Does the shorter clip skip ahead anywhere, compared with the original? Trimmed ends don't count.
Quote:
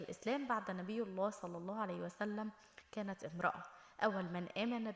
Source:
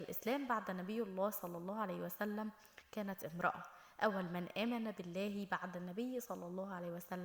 no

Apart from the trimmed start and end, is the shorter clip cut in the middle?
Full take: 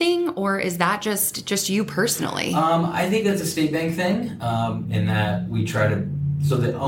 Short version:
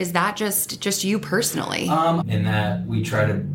yes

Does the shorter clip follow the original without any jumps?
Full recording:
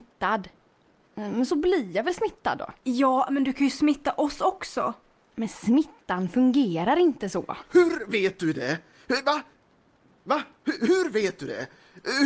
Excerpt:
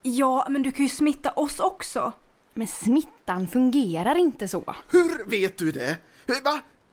yes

